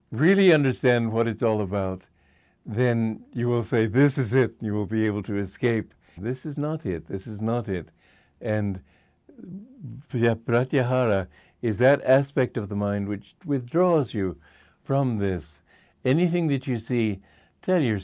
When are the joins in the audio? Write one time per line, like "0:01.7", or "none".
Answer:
0:06.2